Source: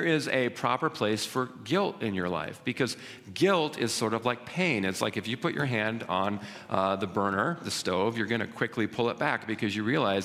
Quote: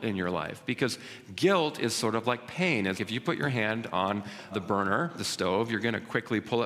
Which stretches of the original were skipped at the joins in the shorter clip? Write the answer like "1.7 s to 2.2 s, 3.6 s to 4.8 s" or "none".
4.9 s to 5.1 s, 6.7 s to 7.0 s